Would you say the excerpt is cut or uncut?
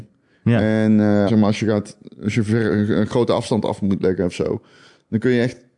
cut